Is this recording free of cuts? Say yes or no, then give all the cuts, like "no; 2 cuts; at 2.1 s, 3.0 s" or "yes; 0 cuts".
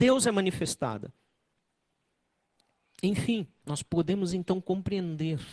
yes; 0 cuts